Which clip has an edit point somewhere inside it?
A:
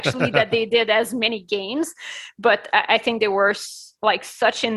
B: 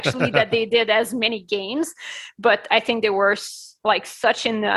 B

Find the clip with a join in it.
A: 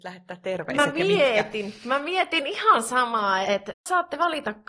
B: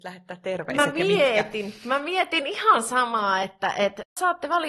A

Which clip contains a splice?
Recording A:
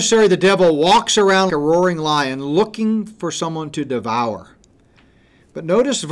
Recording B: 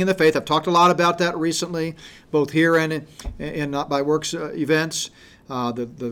A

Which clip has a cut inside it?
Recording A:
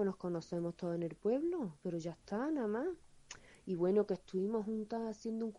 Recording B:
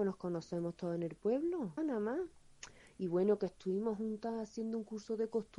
B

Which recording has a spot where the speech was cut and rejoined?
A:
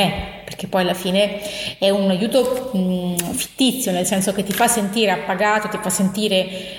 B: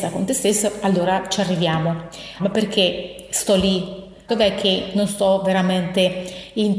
B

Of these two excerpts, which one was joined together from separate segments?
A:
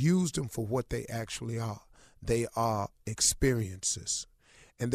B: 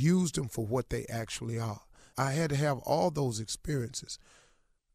B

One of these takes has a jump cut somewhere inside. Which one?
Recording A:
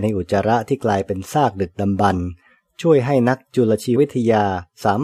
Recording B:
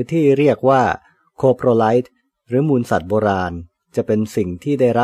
A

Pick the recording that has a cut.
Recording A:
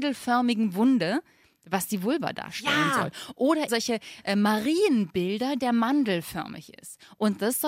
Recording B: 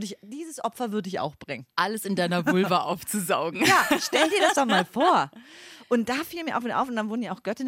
A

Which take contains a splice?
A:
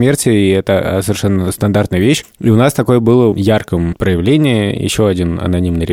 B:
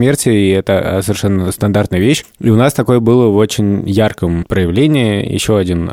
A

